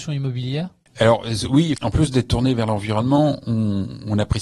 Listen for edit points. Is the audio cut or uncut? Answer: cut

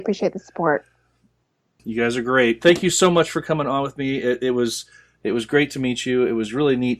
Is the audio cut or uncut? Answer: cut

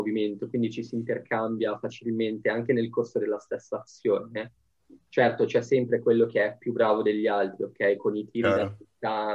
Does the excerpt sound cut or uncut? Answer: uncut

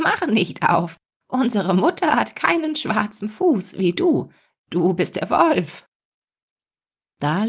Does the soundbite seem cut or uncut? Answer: uncut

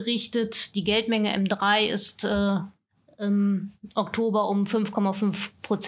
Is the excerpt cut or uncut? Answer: uncut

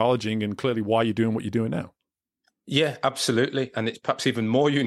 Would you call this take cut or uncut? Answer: cut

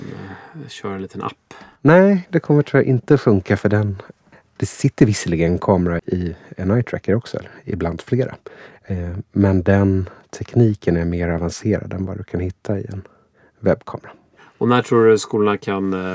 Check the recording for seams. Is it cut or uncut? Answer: cut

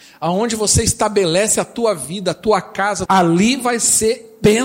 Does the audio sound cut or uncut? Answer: cut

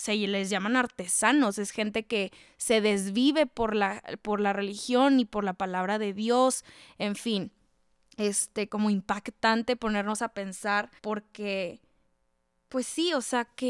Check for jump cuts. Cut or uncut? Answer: cut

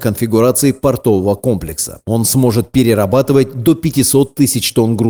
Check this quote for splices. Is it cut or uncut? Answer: cut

